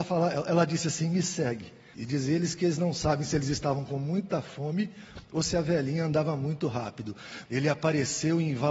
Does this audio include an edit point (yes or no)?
yes